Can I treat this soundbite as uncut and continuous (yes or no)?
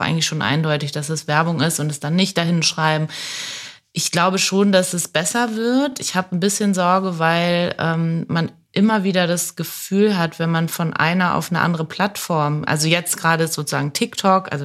yes